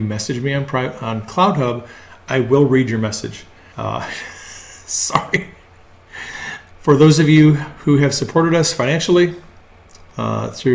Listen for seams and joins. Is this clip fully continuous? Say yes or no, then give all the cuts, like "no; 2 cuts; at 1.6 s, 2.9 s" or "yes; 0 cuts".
no; 2 cuts; at 3.7 s, 6.7 s